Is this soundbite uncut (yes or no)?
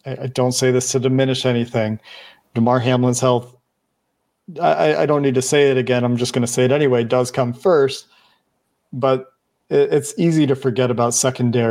yes